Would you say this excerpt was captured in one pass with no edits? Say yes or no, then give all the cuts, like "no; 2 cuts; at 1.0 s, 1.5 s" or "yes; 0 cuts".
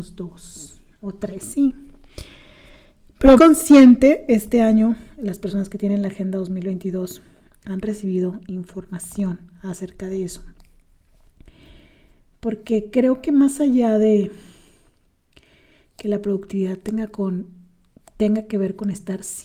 no; 1 cut; at 3.4 s